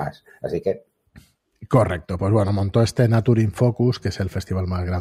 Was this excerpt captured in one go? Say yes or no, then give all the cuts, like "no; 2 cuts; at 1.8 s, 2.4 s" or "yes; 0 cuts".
yes; 0 cuts